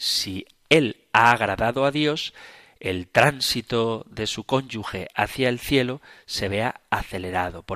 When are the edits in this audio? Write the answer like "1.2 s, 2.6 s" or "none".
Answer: none